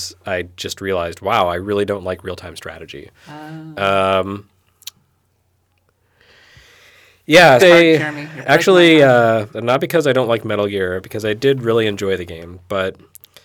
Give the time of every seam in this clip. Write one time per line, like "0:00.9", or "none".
0:07.6
0:09.5